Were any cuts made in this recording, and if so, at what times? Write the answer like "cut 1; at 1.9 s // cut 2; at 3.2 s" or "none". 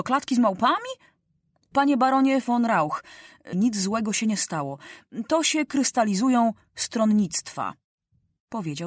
cut 1; at 1.7 s // cut 2; at 3.5 s